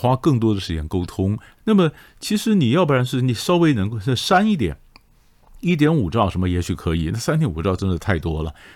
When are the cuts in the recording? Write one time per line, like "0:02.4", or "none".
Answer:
0:01.6